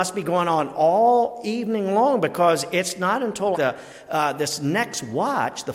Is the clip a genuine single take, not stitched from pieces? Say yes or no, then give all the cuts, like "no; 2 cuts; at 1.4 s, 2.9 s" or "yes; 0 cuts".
no; 1 cut; at 3.5 s